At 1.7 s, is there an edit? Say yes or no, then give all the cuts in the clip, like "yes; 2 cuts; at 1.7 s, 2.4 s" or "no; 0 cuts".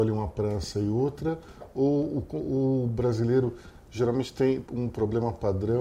no; 1 cut; at 4.6 s